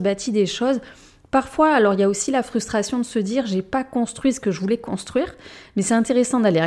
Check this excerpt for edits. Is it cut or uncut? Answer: uncut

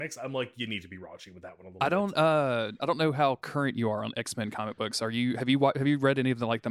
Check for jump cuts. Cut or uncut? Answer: uncut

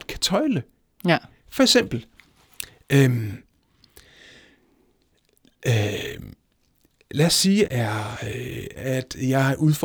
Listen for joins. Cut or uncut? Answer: cut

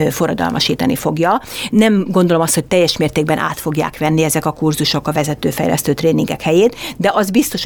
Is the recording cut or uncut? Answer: uncut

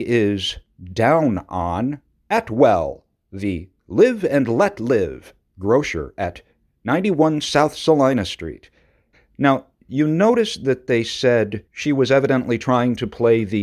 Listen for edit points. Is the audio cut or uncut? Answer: cut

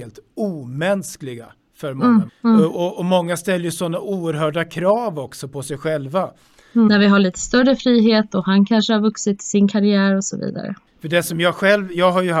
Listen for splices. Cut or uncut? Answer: cut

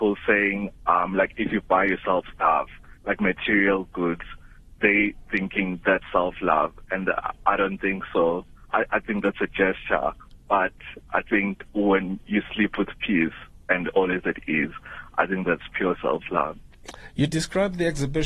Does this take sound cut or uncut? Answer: uncut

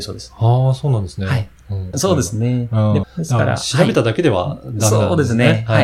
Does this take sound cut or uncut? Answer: cut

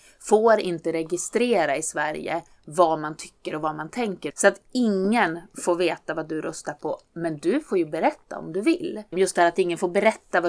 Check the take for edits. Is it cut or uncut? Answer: cut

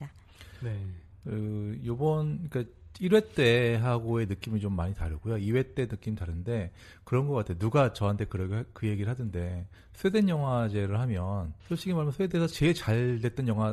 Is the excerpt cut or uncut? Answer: cut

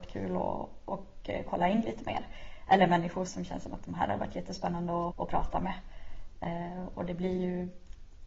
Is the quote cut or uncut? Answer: cut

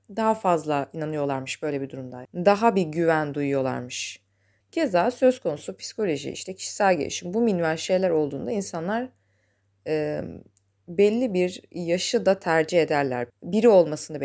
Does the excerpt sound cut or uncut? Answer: cut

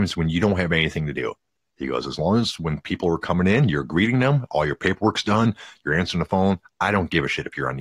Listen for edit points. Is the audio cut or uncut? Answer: uncut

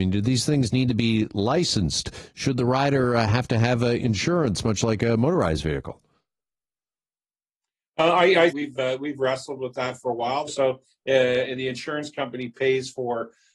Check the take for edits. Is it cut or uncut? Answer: cut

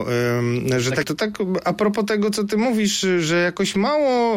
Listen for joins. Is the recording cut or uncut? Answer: cut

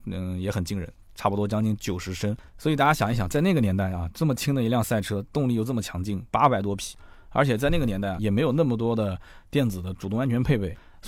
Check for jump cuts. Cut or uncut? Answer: cut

